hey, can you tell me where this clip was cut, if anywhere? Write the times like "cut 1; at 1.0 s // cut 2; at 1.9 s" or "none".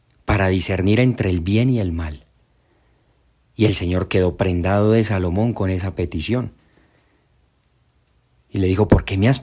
none

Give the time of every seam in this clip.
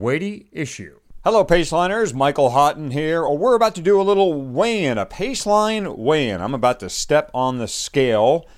none

